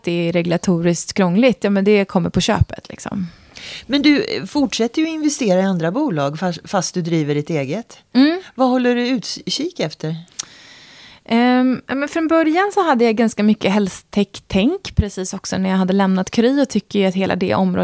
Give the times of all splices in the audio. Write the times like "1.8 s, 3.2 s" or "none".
none